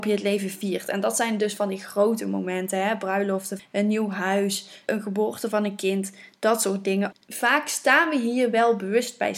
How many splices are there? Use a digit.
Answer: 1